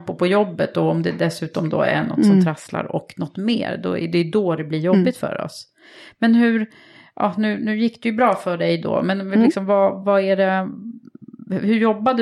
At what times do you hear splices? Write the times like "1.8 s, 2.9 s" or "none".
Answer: none

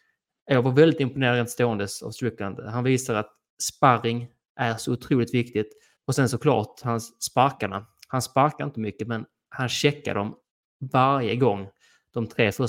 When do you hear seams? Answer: 6.0 s

